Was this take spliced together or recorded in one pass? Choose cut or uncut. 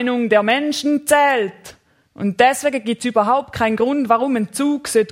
uncut